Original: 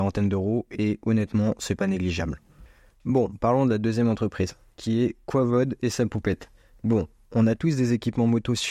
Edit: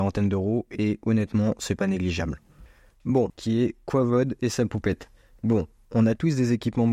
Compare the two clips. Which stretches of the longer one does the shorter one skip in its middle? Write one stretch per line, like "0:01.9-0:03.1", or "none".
0:03.3-0:04.7